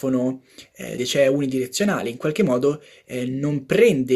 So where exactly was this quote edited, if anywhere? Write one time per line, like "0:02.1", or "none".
0:01.0